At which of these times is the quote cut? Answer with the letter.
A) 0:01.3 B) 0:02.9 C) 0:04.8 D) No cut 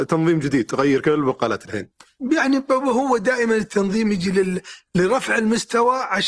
D